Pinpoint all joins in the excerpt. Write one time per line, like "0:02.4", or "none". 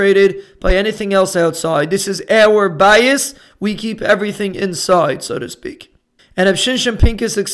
0:06.2